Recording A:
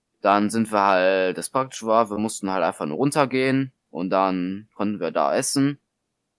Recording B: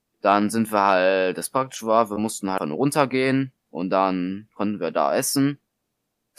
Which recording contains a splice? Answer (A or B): B